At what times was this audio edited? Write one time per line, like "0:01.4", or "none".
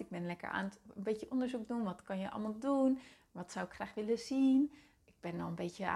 none